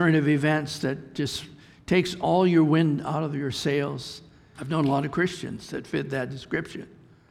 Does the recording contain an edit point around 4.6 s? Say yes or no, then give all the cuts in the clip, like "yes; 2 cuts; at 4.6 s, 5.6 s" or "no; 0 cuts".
yes; 1 cut; at 4.6 s